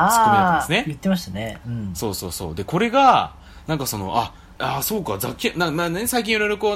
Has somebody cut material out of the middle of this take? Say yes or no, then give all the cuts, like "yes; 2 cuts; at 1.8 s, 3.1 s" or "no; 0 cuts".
yes; 1 cut; at 4.6 s